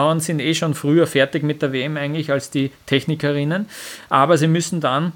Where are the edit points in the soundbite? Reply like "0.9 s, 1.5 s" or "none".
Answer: none